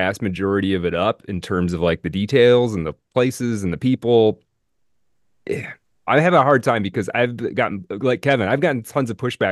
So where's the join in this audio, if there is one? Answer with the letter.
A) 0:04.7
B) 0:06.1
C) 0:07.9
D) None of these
B